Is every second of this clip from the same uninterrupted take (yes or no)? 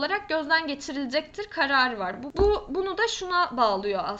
yes